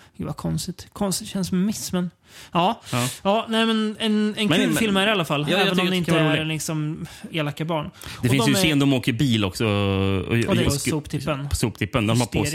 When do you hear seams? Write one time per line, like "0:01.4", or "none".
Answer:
0:07.3
0:10.6